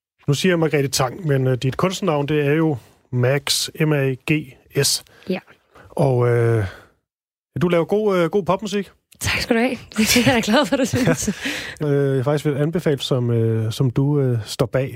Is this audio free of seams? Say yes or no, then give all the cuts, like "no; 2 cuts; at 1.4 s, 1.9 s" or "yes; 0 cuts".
no; 2 cuts; at 11.8 s, 13.0 s